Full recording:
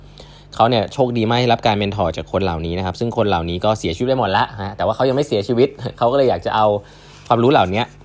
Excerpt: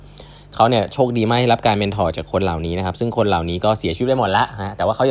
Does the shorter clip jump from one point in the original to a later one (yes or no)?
no